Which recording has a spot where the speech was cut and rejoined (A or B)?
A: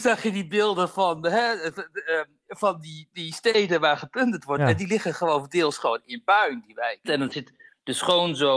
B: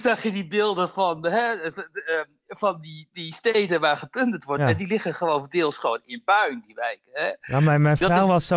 A